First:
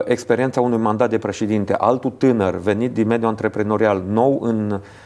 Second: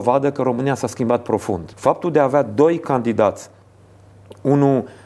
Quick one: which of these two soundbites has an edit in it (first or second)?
second